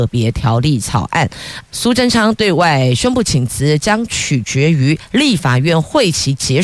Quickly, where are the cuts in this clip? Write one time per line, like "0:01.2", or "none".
0:01.6